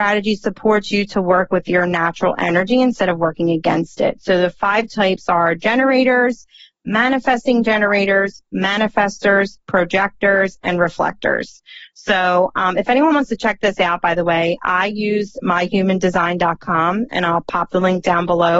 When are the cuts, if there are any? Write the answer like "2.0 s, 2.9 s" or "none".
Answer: none